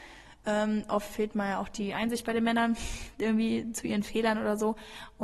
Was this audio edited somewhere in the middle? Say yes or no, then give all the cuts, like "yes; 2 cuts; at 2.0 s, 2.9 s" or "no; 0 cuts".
no; 0 cuts